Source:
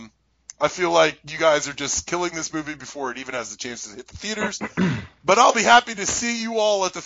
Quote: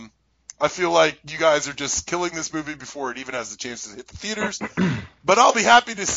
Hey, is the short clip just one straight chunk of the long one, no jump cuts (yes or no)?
yes